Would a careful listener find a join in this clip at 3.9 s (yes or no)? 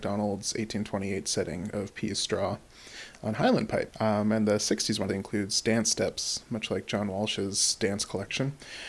yes